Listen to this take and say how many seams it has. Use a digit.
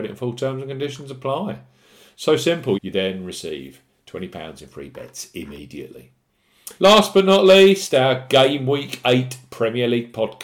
2